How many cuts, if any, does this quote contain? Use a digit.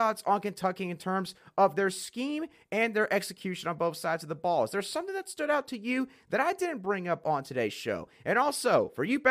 0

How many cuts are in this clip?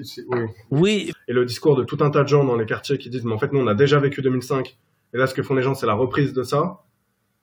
1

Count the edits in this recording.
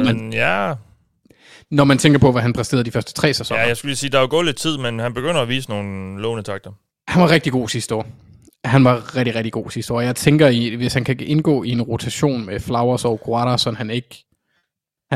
0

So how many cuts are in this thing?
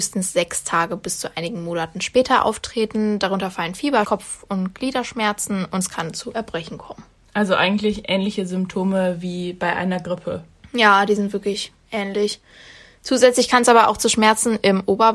1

